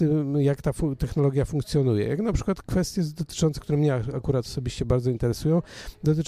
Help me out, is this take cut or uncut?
uncut